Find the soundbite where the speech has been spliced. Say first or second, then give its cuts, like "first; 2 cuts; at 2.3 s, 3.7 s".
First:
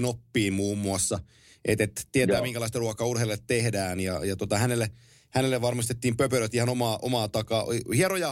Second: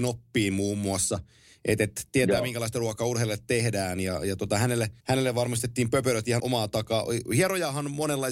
second; 2 cuts; at 5.0 s, 6.4 s